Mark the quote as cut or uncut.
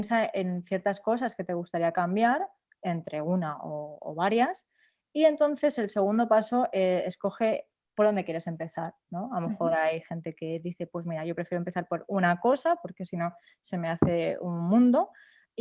uncut